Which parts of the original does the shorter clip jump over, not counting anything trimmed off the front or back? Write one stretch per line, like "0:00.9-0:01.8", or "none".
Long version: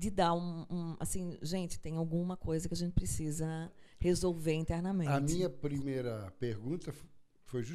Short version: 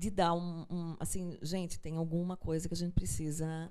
none